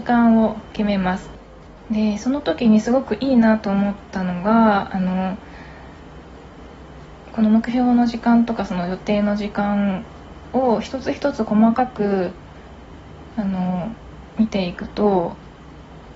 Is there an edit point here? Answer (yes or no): yes